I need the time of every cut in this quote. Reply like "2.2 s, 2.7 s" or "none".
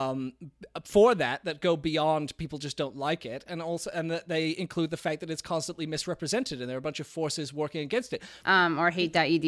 8.4 s